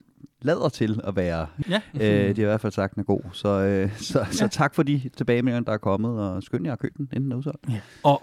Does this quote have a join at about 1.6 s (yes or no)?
yes